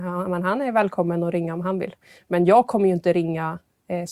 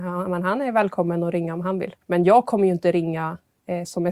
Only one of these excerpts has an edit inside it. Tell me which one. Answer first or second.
second